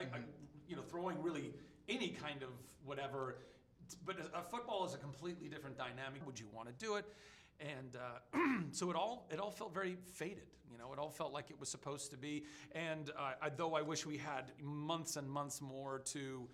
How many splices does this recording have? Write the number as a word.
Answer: one